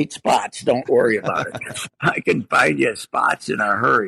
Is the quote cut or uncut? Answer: uncut